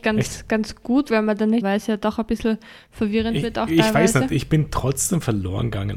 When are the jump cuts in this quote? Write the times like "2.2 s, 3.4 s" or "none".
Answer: 1.6 s

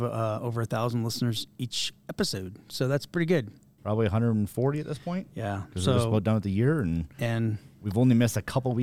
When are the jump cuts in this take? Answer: 3.8 s

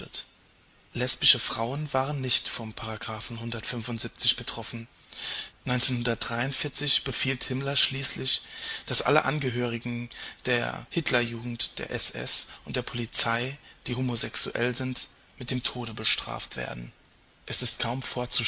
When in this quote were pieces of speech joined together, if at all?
5.5 s

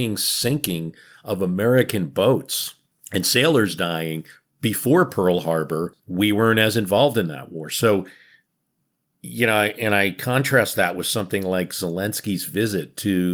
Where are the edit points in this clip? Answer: none

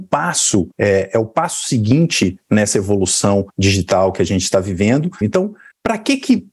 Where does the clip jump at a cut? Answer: 5.2 s

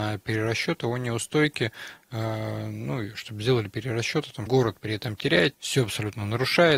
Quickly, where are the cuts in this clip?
4.5 s, 5.5 s

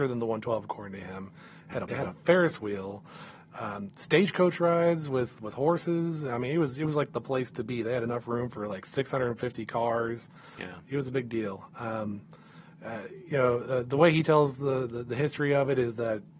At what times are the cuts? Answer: 1.9 s

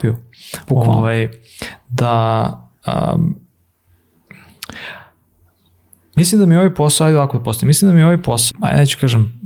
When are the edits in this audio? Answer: 8.5 s

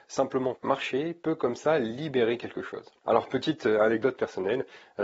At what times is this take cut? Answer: 3.0 s

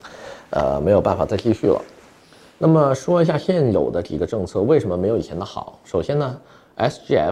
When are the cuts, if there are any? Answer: none

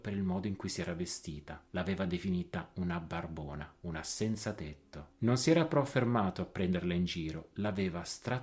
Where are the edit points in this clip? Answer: none

